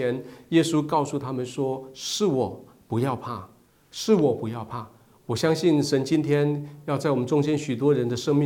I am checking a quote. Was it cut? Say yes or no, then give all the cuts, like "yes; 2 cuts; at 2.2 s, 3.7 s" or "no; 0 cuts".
no; 0 cuts